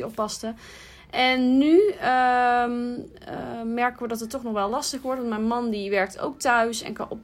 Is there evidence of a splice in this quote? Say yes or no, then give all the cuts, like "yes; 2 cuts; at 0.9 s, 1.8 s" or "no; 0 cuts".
no; 0 cuts